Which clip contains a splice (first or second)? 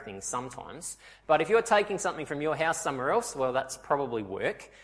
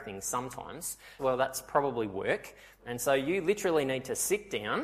second